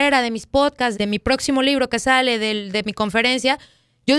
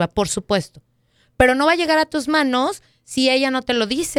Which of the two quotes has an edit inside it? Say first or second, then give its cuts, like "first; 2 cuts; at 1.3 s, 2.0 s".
first; 1 cut; at 0.9 s